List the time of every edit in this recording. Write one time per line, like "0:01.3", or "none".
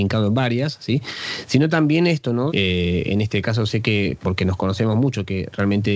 0:02.5